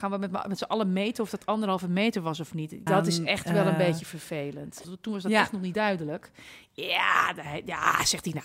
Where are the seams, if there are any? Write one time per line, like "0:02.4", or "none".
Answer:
0:02.9
0:04.8